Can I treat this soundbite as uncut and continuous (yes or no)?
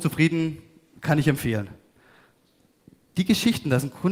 yes